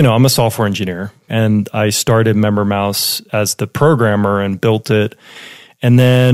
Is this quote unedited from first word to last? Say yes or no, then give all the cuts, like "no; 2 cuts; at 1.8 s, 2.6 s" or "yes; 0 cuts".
no; 1 cut; at 1.3 s